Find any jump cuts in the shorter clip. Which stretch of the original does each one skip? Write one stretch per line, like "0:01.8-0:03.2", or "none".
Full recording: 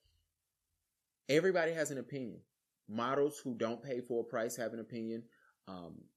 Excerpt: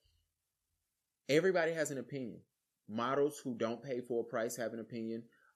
none